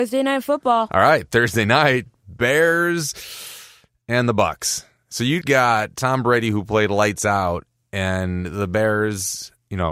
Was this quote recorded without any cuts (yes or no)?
no